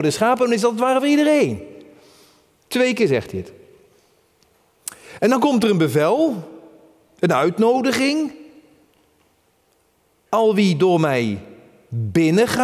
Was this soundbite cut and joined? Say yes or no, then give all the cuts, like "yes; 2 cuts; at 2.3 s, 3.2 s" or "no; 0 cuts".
no; 0 cuts